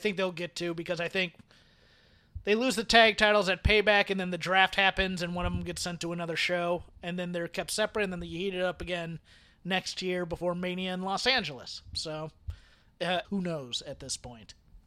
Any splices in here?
yes; 1 cut; at 13.2 s

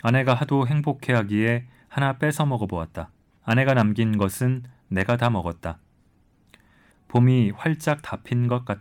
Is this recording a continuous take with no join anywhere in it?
no; 2 cuts; at 3.4 s, 6.9 s

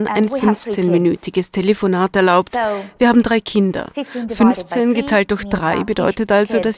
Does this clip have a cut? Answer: no; 0 cuts

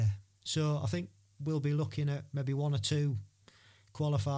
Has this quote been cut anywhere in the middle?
no; 0 cuts

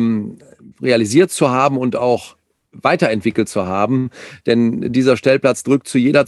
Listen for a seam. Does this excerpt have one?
no; 0 cuts

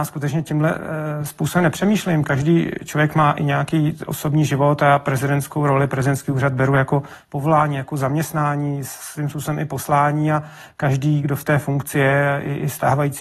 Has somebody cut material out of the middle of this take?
no; 0 cuts

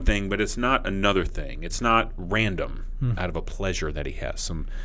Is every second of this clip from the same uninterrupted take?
no; 1 cut; at 3.2 s

